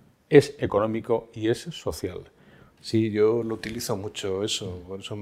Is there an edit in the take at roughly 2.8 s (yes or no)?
yes